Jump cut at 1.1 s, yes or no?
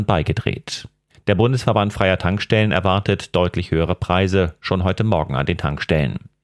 yes